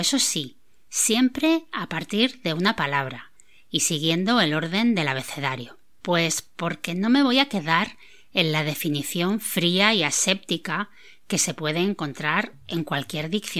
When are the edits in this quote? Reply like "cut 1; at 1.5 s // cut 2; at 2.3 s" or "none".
cut 1; at 6.0 s